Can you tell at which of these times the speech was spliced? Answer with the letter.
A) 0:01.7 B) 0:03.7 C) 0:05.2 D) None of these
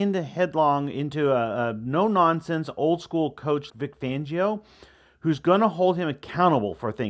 B